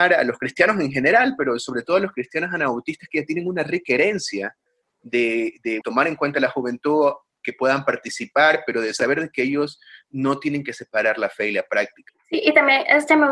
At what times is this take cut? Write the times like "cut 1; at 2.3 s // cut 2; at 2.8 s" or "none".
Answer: cut 1; at 5.8 s // cut 2; at 12.1 s